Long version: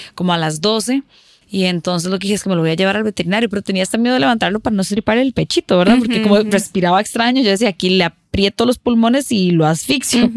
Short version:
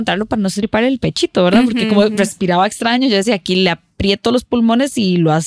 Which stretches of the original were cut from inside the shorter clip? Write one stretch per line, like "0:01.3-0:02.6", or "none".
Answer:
none